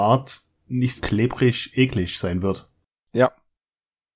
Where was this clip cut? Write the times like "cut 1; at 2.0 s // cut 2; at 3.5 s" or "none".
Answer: cut 1; at 1.0 s